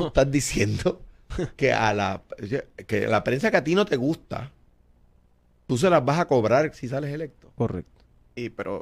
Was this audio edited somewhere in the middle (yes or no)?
no